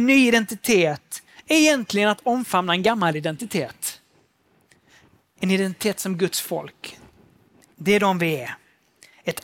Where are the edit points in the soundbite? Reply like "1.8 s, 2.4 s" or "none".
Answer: none